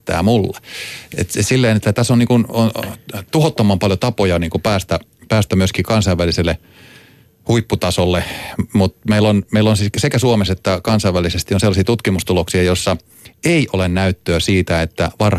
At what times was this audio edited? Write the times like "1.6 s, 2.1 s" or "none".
none